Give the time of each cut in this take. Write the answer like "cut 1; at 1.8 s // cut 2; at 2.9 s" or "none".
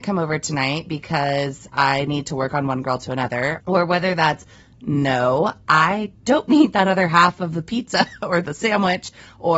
cut 1; at 3.6 s